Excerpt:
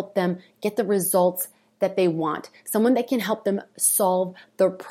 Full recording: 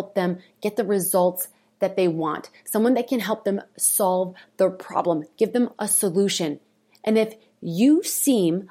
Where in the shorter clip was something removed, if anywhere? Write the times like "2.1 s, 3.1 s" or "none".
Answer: none